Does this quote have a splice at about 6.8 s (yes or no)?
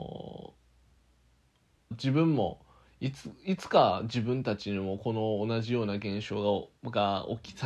no